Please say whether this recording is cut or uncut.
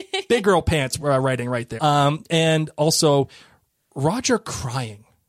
cut